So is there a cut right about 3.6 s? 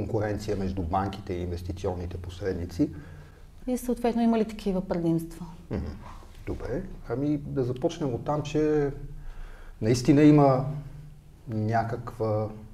yes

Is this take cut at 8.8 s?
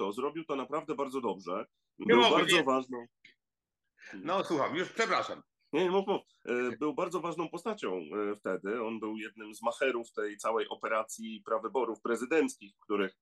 no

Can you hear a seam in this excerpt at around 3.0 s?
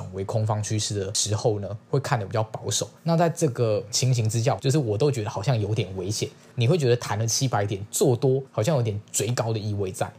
yes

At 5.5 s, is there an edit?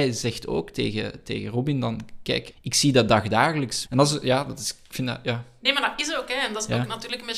no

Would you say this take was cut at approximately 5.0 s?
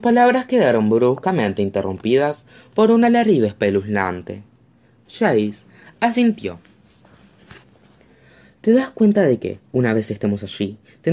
yes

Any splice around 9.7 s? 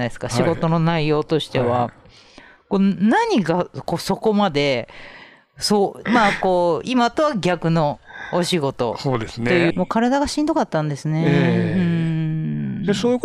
yes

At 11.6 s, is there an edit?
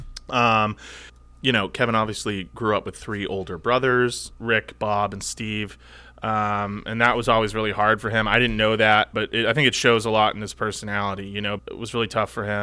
yes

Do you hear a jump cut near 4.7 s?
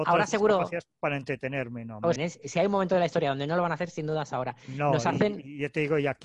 no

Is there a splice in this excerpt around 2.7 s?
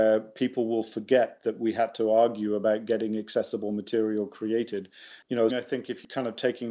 no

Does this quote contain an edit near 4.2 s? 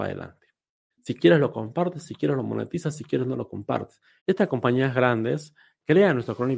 yes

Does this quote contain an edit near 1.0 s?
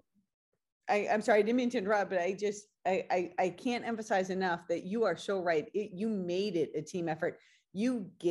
no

